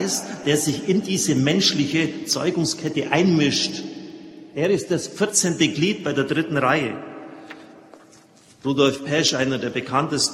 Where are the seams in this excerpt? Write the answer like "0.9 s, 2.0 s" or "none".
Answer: none

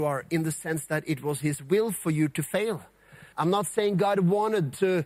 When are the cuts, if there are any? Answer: 3.3 s

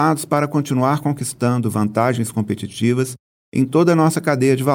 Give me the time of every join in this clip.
none

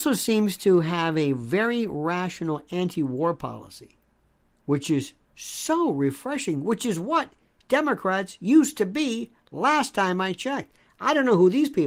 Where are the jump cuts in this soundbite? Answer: none

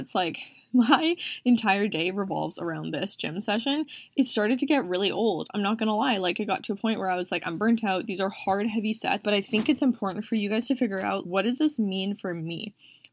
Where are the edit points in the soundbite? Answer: 9.2 s, 11.2 s

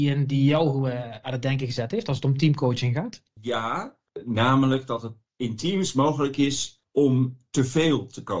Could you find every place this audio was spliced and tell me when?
none

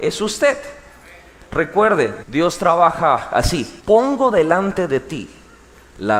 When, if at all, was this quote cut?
2.2 s, 3.8 s

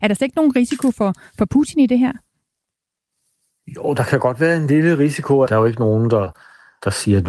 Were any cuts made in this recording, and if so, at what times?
5.5 s

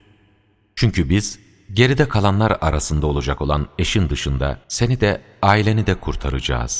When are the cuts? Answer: 4.6 s

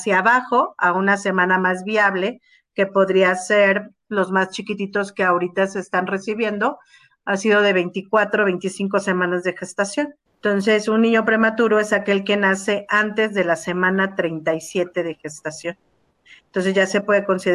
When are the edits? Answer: 10.3 s

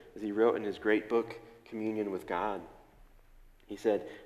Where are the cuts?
none

